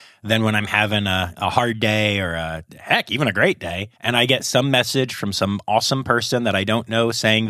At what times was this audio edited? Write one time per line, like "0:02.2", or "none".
0:03.9